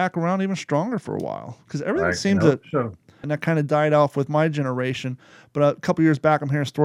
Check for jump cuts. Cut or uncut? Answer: cut